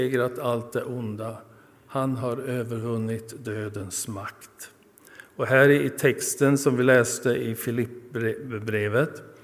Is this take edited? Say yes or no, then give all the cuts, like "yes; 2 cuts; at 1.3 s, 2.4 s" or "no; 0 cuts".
no; 0 cuts